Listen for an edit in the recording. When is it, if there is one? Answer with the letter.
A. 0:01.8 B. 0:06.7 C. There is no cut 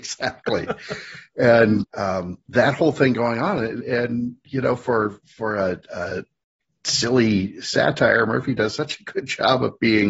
A